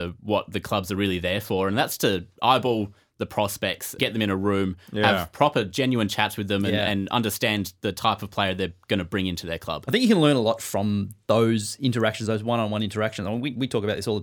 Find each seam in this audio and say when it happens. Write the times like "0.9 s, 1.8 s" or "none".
4.0 s